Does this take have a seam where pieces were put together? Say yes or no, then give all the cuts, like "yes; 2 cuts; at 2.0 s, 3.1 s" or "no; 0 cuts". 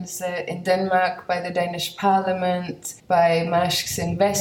yes; 1 cut; at 3.0 s